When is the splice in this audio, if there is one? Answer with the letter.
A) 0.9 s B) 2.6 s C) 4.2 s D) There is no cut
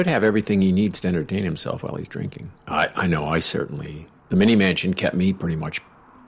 B